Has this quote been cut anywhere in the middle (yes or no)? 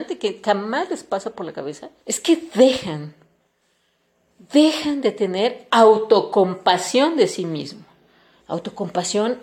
yes